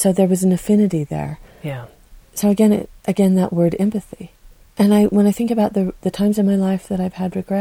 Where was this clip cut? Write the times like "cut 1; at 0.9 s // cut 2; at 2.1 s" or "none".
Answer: cut 1; at 4.6 s // cut 2; at 6.0 s